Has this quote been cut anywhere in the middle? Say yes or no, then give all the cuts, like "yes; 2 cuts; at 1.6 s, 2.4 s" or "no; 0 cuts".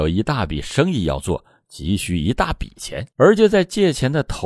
yes; 1 cut; at 3.1 s